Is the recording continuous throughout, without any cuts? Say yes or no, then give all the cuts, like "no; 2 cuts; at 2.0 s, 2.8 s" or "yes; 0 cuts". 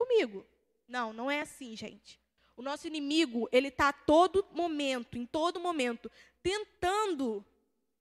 yes; 0 cuts